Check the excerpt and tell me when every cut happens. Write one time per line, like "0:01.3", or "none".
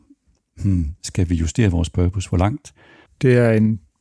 0:03.1